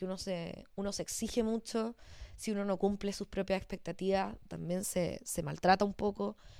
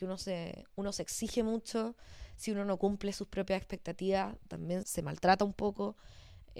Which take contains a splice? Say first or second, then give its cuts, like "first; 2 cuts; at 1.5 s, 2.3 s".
second; 1 cut; at 4.8 s